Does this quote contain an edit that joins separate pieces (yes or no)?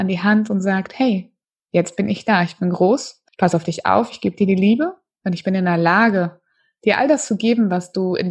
yes